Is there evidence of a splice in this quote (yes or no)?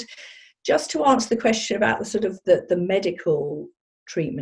no